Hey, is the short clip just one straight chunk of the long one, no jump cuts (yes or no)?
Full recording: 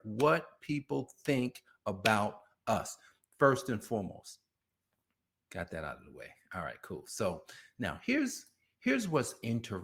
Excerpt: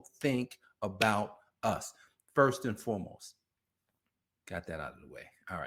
yes